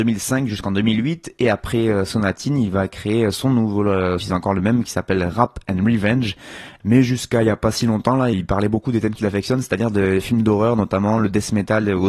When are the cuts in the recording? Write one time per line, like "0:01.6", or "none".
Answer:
0:04.2
0:06.8
0:08.3